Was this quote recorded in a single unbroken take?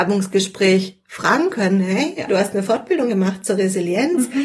no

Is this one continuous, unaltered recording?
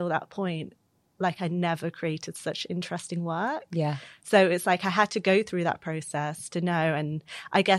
yes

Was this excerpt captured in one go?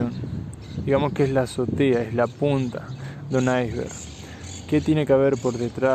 yes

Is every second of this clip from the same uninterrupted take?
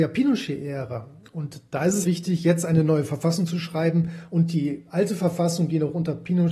no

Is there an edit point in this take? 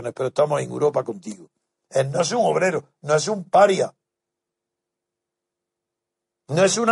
yes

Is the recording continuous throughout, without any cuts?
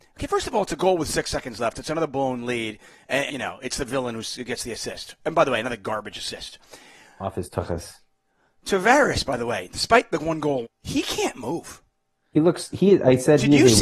no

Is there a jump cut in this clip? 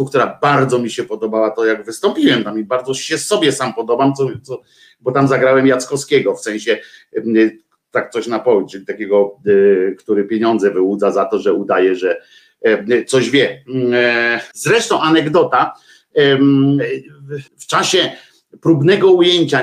yes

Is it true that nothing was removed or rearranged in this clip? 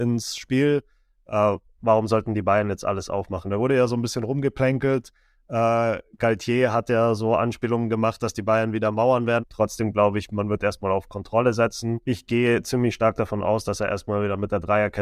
no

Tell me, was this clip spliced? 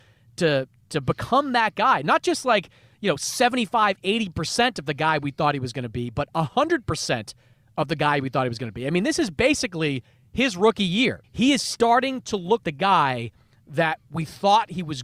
yes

